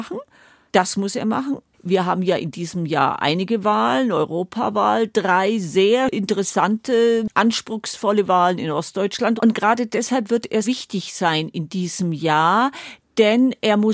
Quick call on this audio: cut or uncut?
cut